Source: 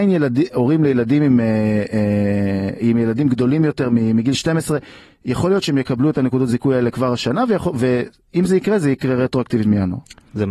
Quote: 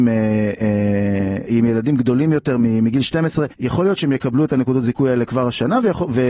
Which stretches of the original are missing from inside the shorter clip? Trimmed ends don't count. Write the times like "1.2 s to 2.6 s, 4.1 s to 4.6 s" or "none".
4.8 s to 5.2 s